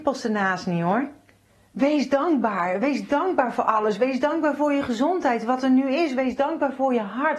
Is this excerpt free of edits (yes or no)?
yes